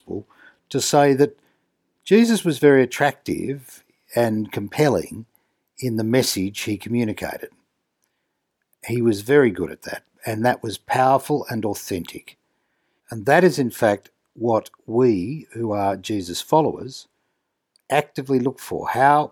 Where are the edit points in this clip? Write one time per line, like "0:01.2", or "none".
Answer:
0:13.0